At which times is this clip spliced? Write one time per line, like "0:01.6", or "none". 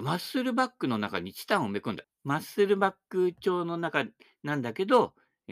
0:02.0